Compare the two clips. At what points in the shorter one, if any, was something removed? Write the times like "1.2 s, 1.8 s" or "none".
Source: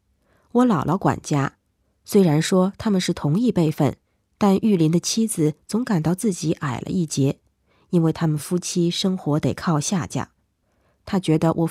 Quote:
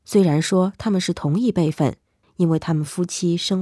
2.2 s